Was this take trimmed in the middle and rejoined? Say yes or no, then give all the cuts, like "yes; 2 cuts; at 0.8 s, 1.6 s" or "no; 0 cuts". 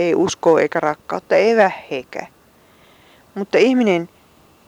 no; 0 cuts